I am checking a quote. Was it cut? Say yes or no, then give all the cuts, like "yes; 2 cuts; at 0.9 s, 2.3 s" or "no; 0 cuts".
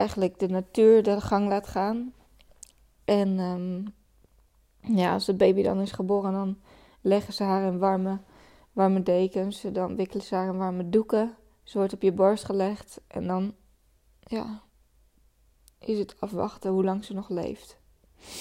no; 0 cuts